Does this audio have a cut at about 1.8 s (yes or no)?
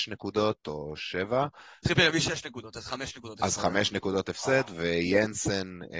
yes